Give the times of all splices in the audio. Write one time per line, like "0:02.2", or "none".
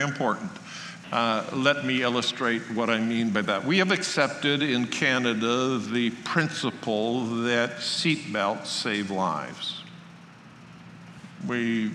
0:01.0

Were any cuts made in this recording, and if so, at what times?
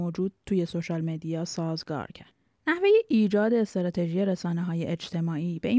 none

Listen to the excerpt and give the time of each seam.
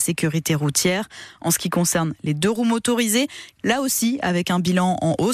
0:03.6

